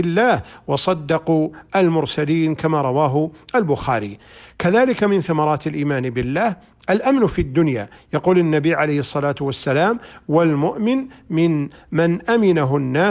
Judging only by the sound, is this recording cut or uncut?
uncut